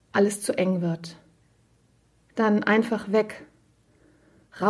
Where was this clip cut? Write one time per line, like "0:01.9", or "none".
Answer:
none